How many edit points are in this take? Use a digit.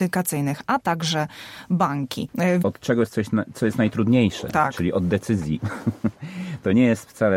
1